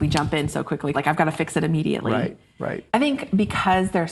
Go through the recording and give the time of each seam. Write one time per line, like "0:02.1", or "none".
0:00.9
0:02.9